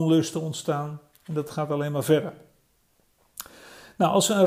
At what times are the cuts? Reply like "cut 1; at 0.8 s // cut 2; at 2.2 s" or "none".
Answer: none